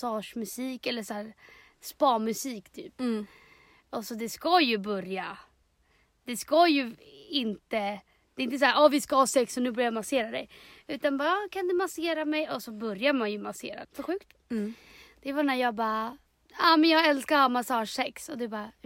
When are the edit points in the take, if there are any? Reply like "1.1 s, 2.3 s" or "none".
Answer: 13.8 s